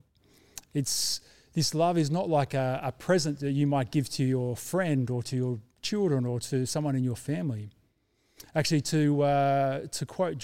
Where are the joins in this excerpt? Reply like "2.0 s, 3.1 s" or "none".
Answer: none